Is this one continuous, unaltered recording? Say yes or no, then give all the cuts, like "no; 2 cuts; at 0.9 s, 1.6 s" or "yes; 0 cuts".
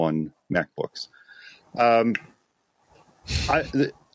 yes; 0 cuts